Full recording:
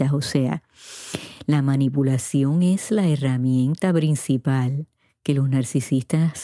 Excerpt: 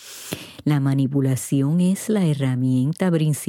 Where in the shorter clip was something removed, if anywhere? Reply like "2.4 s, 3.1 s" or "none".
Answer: none